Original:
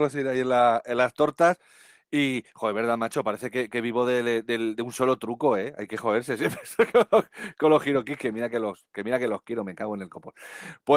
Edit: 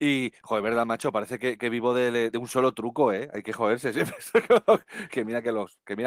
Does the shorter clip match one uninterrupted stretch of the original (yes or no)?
no